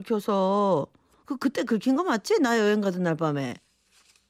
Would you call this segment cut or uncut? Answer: uncut